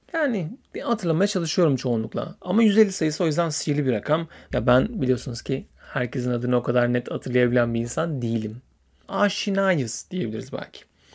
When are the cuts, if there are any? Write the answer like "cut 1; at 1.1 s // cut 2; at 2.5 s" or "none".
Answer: cut 1; at 4.5 s // cut 2; at 9.0 s